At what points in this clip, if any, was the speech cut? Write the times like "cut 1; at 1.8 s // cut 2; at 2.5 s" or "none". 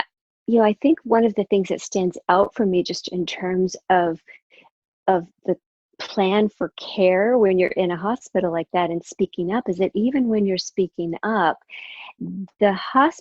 none